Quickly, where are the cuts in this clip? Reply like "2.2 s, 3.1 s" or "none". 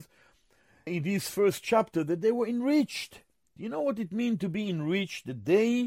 3.6 s